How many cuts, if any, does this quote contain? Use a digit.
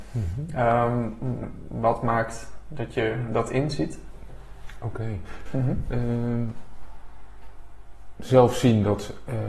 1